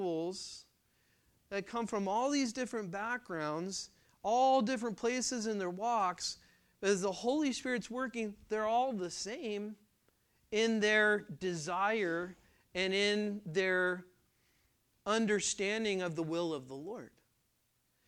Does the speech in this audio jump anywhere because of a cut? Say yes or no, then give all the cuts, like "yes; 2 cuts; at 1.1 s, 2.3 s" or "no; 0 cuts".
no; 0 cuts